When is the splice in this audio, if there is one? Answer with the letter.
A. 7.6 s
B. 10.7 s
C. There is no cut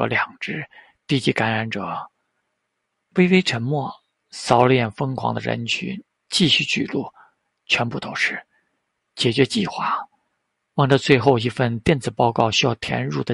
C